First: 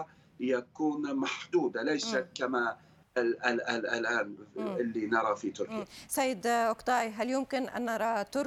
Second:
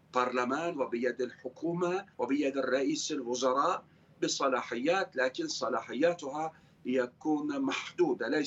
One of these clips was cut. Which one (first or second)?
second